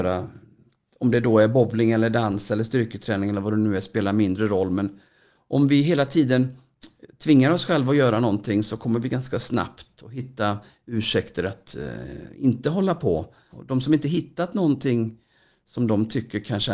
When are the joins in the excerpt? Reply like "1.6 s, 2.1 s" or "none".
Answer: 13.5 s

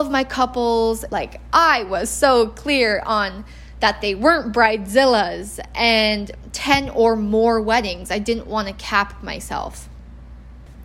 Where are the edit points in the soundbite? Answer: 1.1 s

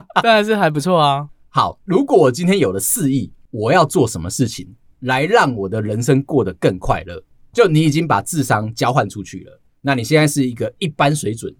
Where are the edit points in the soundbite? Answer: none

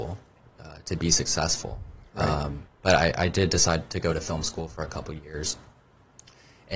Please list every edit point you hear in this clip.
none

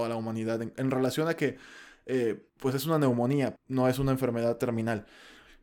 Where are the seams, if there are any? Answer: 2.5 s, 3.6 s

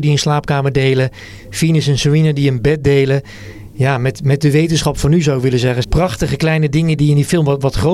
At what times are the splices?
5.8 s, 7.0 s

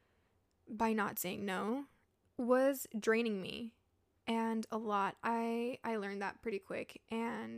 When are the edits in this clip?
none

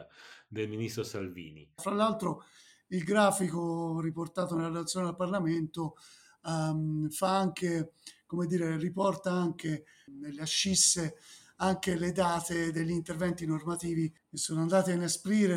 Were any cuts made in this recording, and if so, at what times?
1.8 s

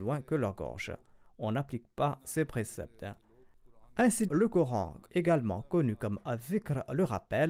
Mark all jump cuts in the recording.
4.3 s

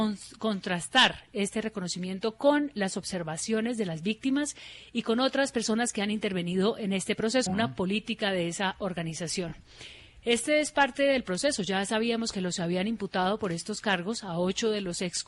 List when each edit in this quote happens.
7.5 s

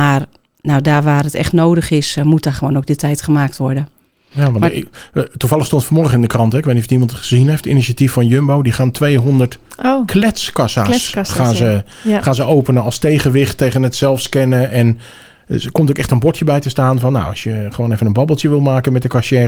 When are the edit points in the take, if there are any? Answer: none

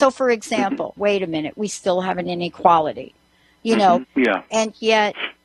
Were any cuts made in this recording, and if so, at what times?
1.0 s, 4.0 s

